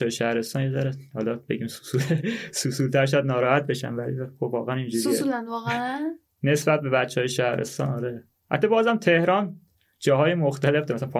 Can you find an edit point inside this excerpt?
no; 0 cuts

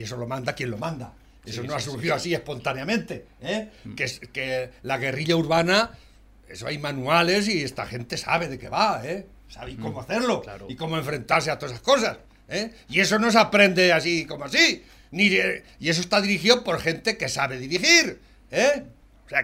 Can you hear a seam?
no; 0 cuts

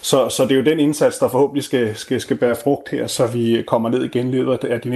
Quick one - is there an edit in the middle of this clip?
no; 0 cuts

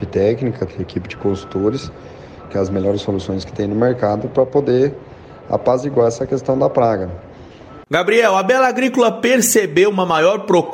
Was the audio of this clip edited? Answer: yes; 2 cuts; at 2.5 s, 7.8 s

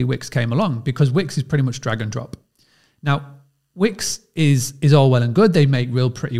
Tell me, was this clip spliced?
no; 0 cuts

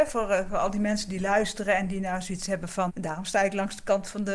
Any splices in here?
yes; 1 cut; at 2.9 s

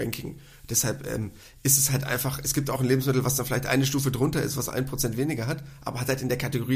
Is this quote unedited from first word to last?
yes; 0 cuts

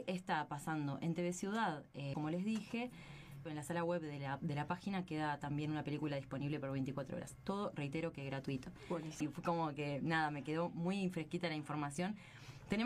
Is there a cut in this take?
yes; 3 cuts; at 2.1 s, 3.5 s, 9.2 s

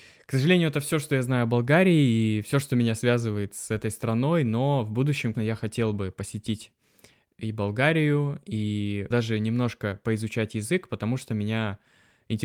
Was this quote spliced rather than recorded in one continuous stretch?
yes; 2 cuts; at 5.3 s, 9.1 s

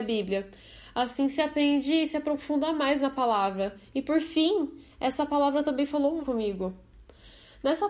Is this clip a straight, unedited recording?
no; 1 cut; at 6.2 s

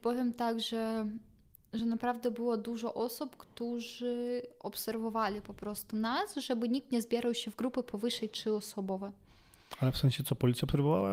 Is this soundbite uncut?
yes; 0 cuts

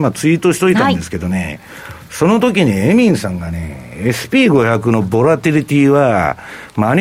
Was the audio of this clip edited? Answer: no; 0 cuts

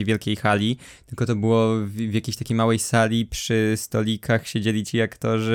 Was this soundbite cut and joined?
no; 0 cuts

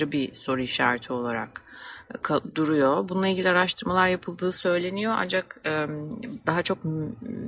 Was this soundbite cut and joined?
yes; 1 cut; at 6.4 s

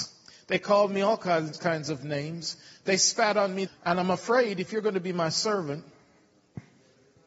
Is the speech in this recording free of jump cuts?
no; 1 cut; at 3.7 s

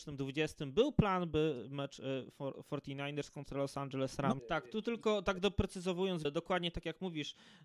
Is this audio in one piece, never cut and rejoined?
no; 2 cuts; at 4.4 s, 6.2 s

